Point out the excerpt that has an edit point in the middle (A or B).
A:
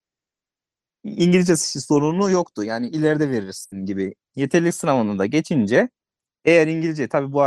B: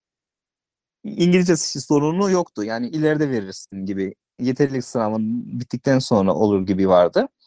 A